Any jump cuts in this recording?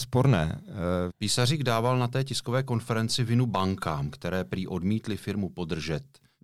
yes; 1 cut; at 1.1 s

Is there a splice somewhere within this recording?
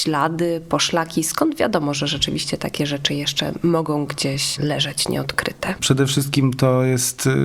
yes; 1 cut; at 5.8 s

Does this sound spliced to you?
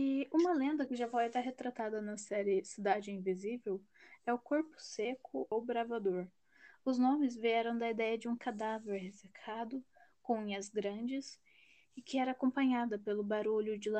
yes; 1 cut; at 5.5 s

